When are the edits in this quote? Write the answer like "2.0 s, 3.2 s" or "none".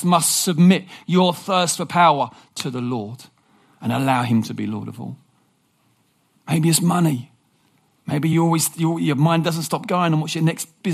none